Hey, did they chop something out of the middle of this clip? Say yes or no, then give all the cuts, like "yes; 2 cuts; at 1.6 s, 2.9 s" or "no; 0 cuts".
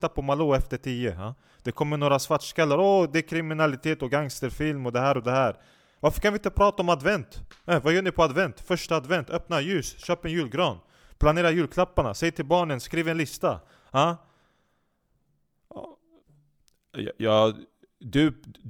no; 0 cuts